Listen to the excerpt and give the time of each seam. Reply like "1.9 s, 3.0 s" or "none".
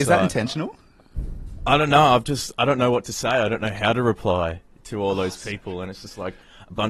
none